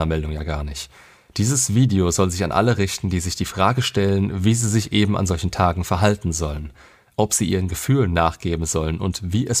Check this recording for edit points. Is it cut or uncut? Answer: uncut